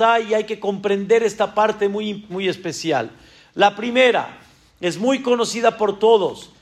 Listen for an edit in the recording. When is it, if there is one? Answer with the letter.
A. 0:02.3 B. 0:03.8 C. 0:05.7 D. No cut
A